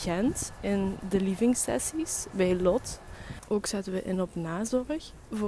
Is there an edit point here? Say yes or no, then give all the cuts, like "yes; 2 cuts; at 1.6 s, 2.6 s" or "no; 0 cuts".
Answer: yes; 1 cut; at 3.4 s